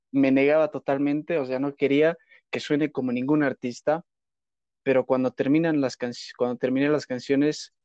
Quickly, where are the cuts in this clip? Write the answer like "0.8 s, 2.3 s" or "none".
none